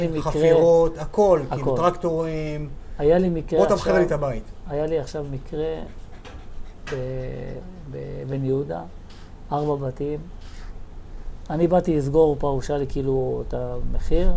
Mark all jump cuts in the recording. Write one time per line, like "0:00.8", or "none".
none